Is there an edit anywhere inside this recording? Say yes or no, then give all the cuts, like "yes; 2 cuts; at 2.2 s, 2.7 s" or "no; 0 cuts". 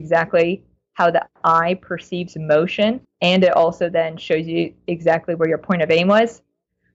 yes; 1 cut; at 3.0 s